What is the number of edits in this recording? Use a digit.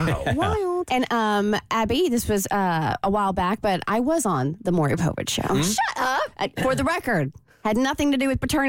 1